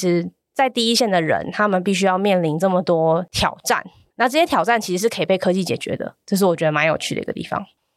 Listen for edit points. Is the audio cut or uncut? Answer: uncut